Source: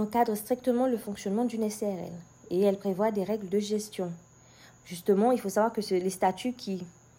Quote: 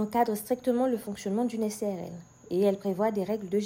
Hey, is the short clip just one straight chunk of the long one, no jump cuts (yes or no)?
yes